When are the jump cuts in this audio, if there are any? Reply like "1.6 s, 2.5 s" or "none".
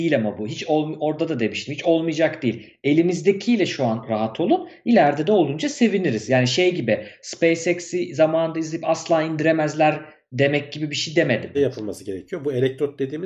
11.5 s